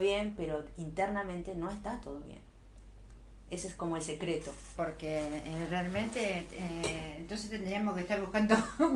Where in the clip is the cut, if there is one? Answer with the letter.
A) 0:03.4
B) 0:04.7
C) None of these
B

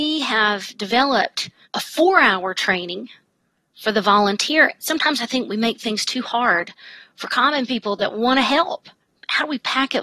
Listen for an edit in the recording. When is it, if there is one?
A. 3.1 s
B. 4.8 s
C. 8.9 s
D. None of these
B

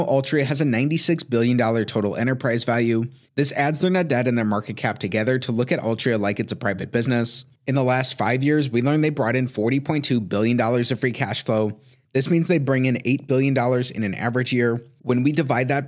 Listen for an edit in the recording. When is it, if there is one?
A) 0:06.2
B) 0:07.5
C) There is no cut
C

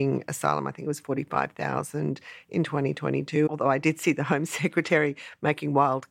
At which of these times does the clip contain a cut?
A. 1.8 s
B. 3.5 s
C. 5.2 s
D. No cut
B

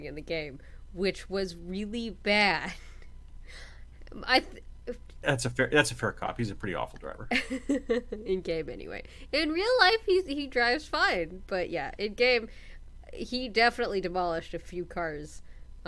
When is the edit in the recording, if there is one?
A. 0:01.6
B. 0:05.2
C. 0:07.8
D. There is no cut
B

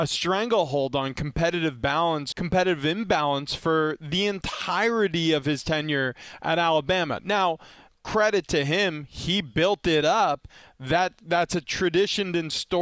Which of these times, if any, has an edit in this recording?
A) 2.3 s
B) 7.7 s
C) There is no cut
A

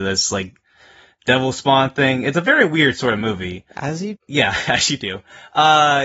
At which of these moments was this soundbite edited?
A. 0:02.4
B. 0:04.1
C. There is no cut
B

